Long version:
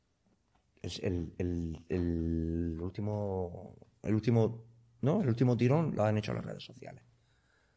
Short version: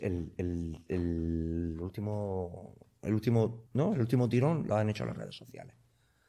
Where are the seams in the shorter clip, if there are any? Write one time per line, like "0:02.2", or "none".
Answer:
0:03.7